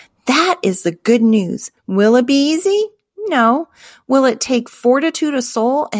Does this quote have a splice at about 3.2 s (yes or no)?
no